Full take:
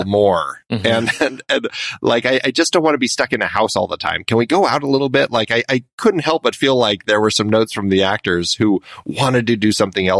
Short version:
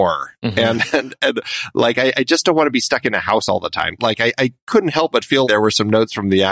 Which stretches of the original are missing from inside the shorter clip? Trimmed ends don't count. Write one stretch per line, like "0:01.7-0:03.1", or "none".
0:04.3-0:05.3
0:06.7-0:07.0